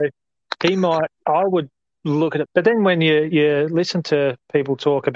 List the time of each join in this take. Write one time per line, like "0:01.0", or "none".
0:02.5